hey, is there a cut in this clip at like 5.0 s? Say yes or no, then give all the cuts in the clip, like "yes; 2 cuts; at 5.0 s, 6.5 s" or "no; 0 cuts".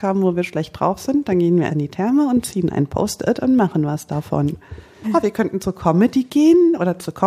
yes; 2 cuts; at 1.7 s, 5.0 s